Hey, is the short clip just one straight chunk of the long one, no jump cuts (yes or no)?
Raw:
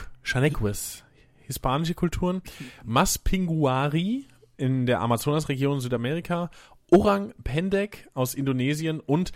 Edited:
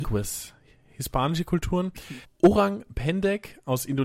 no